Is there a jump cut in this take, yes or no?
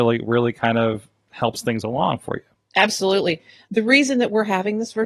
yes